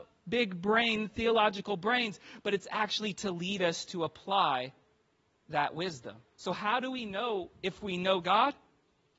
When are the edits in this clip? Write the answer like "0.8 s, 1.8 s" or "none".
none